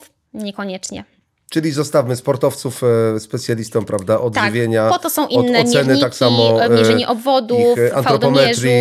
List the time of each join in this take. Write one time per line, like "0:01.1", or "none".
none